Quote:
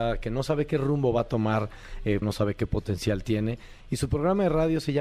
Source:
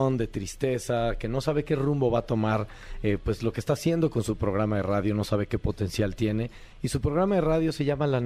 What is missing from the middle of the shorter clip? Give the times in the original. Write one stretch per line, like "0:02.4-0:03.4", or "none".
0:03.2-0:05.1